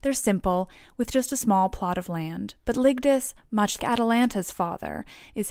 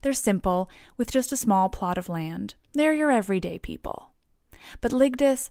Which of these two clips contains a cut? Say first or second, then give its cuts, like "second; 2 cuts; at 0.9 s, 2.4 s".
first; 2 cuts; at 2.6 s, 3.8 s